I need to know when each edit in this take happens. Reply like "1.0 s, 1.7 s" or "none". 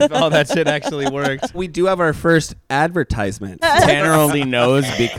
1.5 s, 3.6 s